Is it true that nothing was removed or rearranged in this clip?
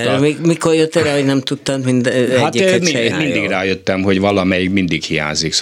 no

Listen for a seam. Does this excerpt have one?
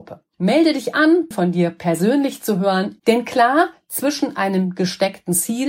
yes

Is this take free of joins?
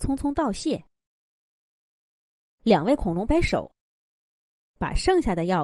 no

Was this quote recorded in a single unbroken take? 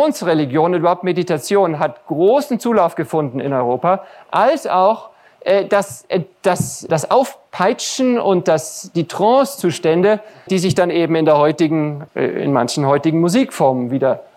no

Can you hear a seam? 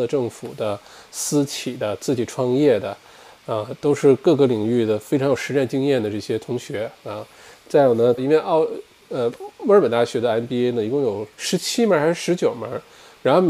yes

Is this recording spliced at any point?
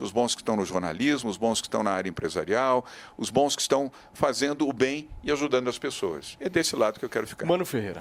no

